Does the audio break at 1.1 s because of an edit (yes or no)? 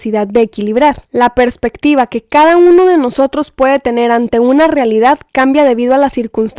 yes